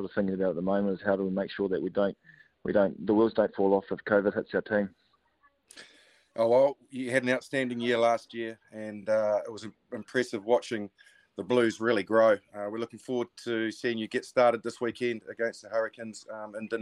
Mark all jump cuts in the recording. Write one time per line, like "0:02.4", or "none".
none